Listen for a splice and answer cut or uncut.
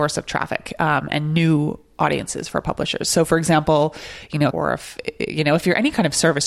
cut